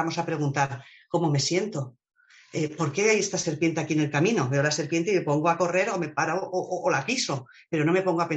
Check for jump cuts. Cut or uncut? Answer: uncut